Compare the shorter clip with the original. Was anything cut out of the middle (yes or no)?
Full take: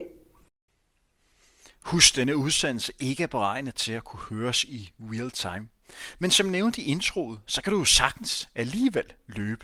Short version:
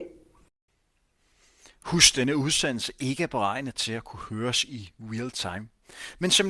no